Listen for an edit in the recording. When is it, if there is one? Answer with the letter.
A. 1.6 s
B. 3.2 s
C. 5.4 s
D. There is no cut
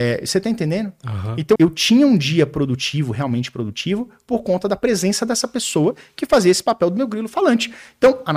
A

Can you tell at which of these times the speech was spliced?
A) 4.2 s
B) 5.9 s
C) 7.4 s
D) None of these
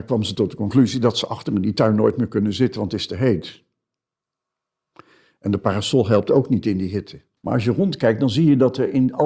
C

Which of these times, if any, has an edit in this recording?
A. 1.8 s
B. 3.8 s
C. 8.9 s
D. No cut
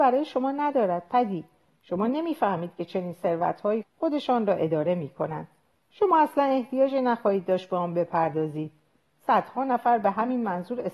B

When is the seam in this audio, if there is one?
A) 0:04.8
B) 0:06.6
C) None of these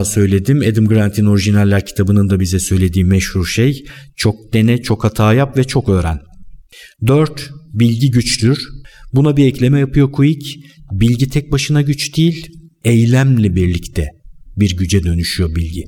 A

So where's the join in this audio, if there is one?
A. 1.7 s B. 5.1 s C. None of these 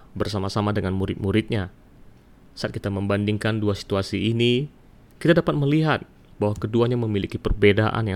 C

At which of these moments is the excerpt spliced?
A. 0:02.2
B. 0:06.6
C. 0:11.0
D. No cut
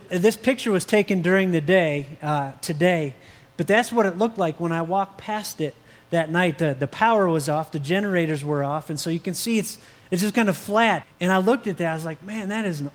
C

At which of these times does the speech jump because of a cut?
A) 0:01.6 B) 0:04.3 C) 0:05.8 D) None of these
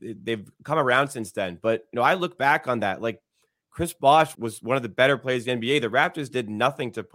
B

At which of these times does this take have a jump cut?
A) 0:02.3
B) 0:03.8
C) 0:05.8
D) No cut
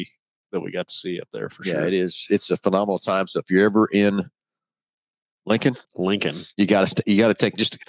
C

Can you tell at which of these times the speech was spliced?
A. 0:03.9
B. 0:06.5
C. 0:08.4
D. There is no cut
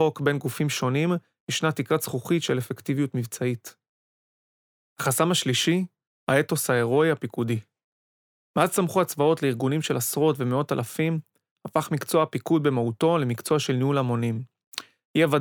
D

